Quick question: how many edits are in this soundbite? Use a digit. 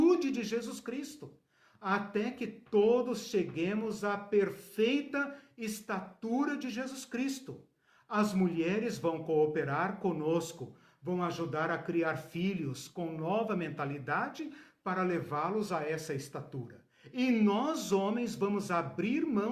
0